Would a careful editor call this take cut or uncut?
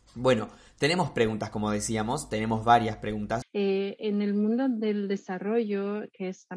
cut